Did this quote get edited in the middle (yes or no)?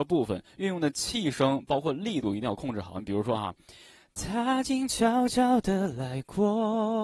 no